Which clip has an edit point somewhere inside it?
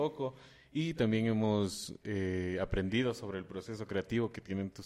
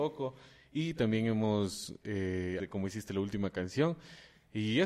second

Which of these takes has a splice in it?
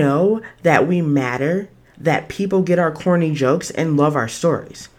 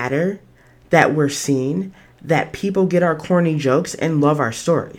first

